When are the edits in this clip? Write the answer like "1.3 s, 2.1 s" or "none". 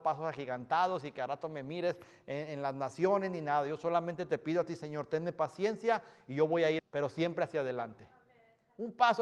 6.8 s